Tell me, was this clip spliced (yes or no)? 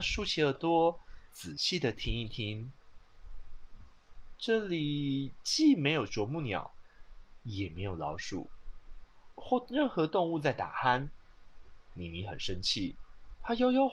yes